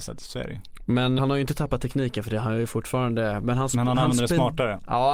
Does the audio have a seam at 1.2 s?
yes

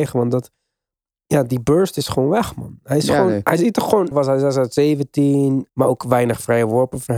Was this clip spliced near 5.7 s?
yes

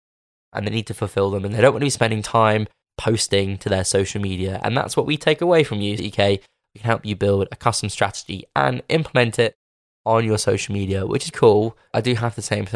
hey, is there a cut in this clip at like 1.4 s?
no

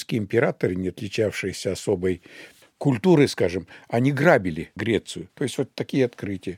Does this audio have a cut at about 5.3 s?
yes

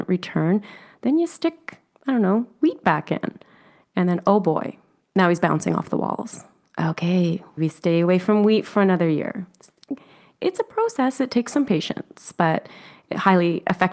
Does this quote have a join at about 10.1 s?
no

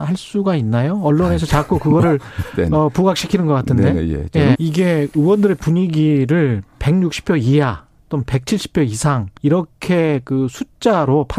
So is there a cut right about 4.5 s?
yes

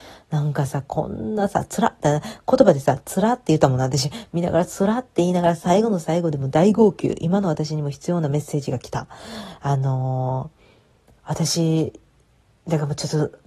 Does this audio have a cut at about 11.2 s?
yes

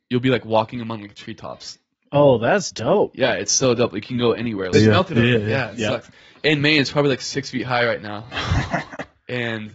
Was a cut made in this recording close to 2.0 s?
no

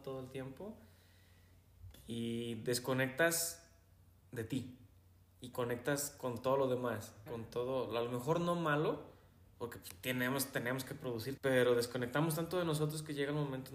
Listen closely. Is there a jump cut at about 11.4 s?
yes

